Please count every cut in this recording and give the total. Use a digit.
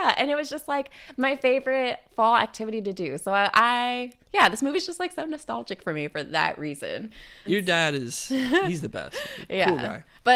1